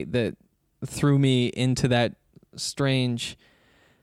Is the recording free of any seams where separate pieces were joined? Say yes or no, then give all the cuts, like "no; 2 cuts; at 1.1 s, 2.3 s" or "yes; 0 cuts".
yes; 0 cuts